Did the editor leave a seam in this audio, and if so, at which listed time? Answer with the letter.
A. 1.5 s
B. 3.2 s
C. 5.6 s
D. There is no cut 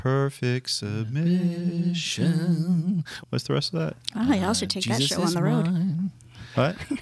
B